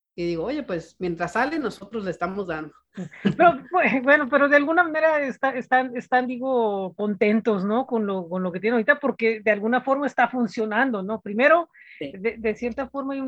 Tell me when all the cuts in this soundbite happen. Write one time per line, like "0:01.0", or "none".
none